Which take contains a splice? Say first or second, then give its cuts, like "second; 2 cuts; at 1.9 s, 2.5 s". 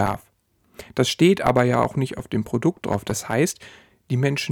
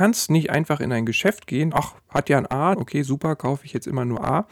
second; 2 cuts; at 1.7 s, 2.7 s